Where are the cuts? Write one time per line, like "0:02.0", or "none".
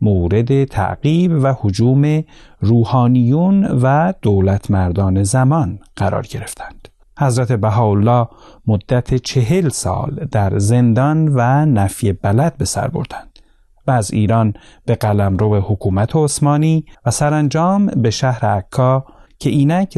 0:07.0
0:16.9